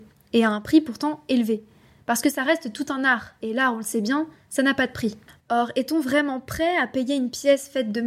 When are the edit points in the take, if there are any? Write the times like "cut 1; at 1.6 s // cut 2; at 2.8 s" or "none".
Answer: none